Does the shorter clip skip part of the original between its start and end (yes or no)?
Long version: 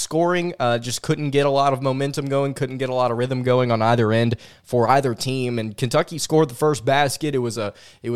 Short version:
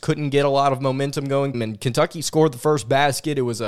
yes